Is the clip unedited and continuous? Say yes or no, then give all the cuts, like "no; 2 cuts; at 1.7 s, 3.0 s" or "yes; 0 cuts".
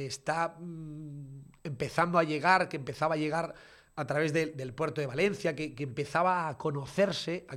yes; 0 cuts